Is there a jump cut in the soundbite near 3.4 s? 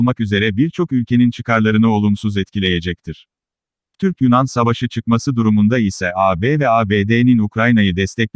no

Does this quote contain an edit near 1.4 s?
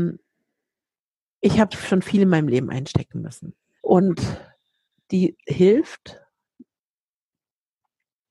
no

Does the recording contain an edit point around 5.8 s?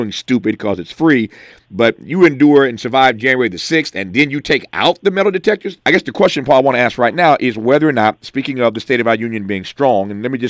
yes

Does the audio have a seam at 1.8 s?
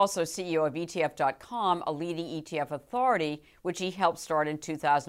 no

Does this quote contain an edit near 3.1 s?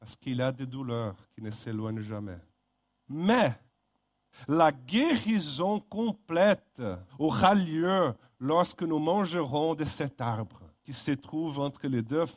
yes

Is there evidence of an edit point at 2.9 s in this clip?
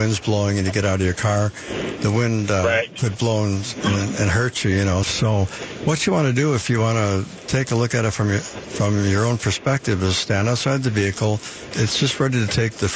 no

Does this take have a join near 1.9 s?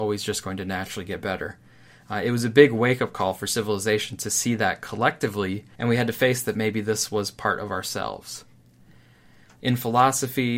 no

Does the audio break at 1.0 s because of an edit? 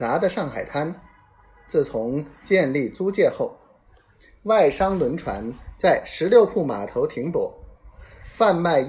no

